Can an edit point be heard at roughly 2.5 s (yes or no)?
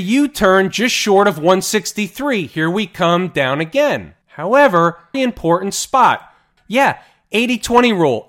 no